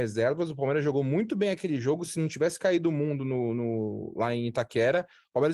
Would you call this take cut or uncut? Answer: uncut